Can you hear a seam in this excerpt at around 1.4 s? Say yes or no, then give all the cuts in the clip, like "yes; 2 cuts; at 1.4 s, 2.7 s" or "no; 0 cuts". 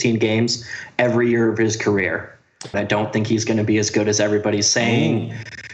no; 1 cut; at 2.7 s